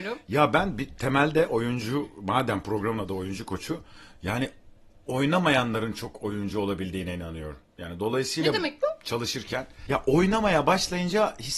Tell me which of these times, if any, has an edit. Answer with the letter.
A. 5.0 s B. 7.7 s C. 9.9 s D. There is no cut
C